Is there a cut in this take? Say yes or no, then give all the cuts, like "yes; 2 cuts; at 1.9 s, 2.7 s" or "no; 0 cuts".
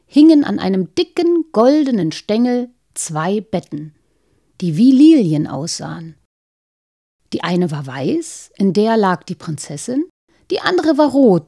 no; 0 cuts